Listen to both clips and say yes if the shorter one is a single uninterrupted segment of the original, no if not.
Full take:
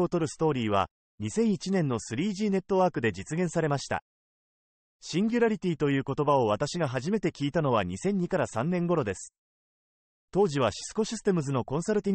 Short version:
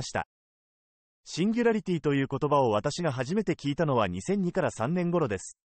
yes